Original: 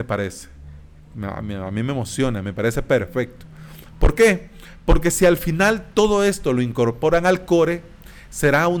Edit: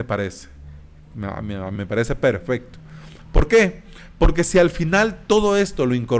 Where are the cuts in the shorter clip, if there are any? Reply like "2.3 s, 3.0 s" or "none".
1.8 s

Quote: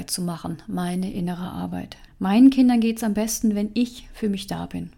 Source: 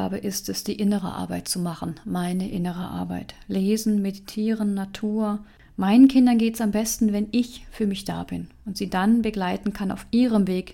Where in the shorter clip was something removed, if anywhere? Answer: 2.1 s

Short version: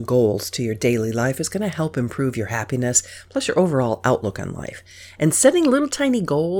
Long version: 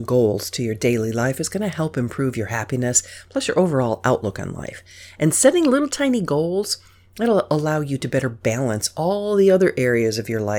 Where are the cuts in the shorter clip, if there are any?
none

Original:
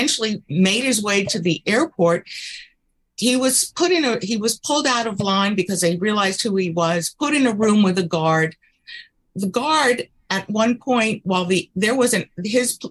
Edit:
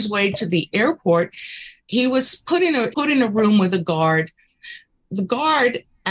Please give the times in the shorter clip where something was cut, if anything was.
1.8 s, 2.9 s

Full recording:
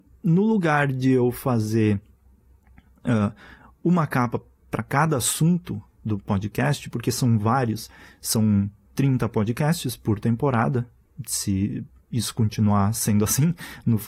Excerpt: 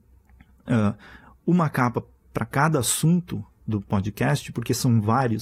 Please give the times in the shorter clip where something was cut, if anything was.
none

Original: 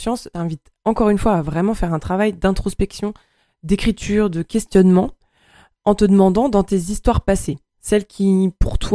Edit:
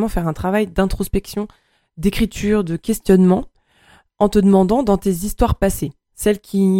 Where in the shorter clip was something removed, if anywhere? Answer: none

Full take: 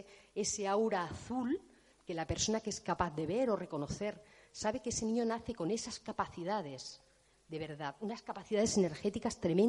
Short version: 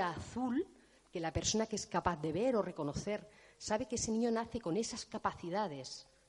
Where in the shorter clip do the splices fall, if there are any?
none

